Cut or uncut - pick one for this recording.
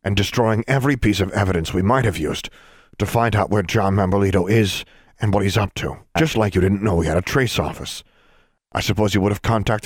cut